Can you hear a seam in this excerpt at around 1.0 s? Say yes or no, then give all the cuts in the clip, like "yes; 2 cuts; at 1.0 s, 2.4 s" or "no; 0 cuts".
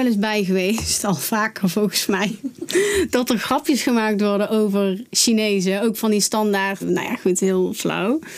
no; 1 cut; at 6.8 s